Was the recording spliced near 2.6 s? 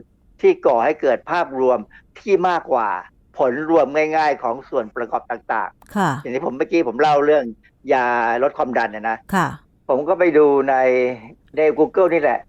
yes; 1 cut; at 2.6 s

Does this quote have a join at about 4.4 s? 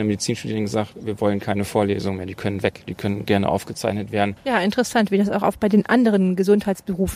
yes; 1 cut; at 4.4 s

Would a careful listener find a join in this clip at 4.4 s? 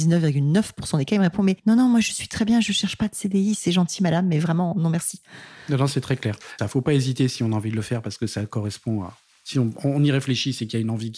no; 1 cut; at 6.6 s

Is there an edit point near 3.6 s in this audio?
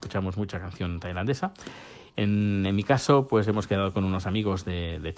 no; 1 cut; at 2.1 s

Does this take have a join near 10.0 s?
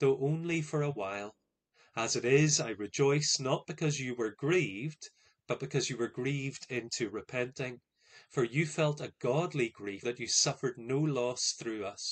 yes; 1 cut; at 10.0 s

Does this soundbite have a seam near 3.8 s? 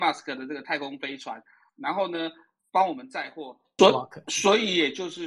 yes; 1 cut; at 3.8 s

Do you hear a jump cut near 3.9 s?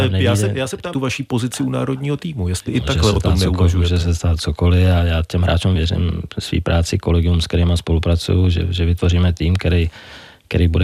no; 2 cuts; at 0.9 s, 5.8 s

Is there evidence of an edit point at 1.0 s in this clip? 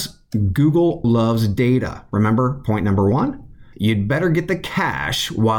yes; 2 cuts; at 1.0 s, 3.7 s

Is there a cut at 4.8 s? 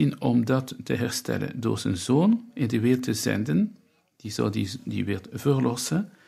no; 0 cuts

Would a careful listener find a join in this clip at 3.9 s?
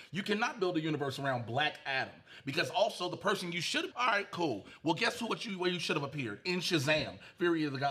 yes; 1 cut; at 3.9 s

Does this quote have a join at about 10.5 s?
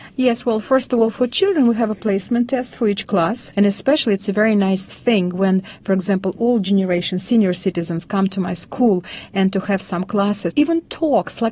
yes; 2 cuts; at 3.5 s, 10.5 s

